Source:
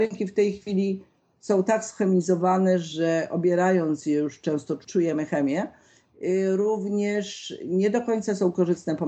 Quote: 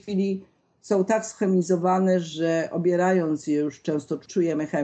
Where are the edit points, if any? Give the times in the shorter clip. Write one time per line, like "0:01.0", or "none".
none